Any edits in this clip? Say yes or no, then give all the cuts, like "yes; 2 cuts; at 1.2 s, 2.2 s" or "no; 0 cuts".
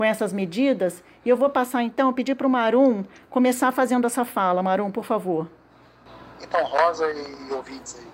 no; 0 cuts